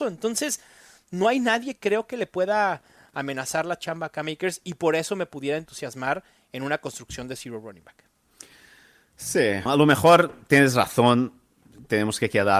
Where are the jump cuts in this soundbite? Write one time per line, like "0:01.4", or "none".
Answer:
0:09.7